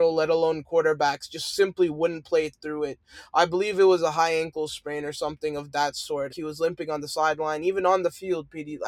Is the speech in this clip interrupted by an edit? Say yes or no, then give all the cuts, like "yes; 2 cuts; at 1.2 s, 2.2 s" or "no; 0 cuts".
yes; 1 cut; at 6.3 s